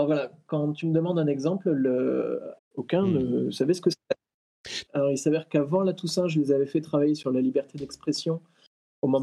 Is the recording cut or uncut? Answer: cut